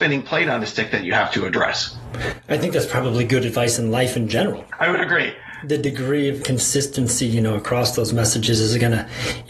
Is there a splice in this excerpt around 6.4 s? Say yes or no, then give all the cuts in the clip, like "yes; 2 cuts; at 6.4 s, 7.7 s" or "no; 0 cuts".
yes; 1 cut; at 6.4 s